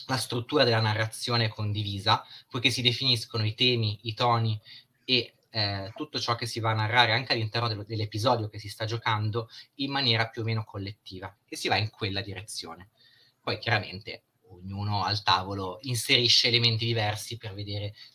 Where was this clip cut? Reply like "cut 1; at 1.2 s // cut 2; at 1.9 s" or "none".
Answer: cut 1; at 11.4 s